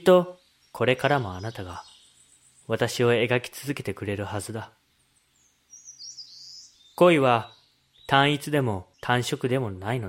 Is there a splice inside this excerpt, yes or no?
yes